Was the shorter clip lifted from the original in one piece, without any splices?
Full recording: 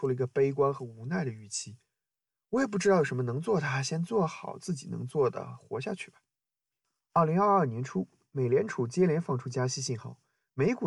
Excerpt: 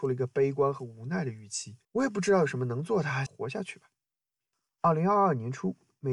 no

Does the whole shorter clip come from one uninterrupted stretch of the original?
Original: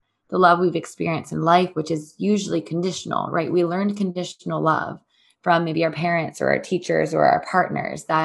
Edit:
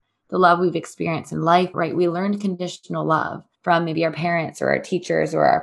no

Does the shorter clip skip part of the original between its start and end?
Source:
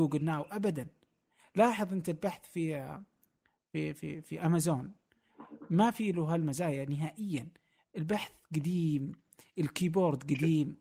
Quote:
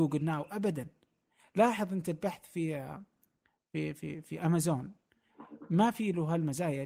no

